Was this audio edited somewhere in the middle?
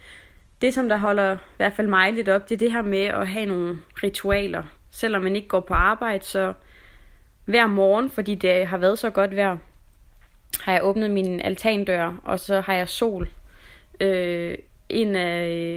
no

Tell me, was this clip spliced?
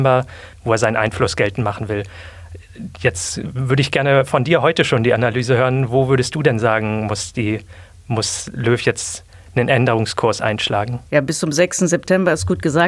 yes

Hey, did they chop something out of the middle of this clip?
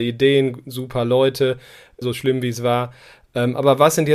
yes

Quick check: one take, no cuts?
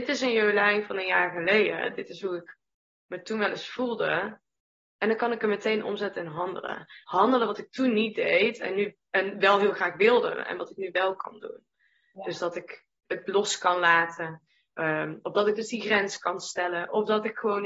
yes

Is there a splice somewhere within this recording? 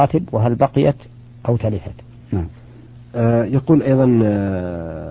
yes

